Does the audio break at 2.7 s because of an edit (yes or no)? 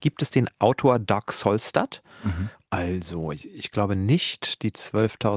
yes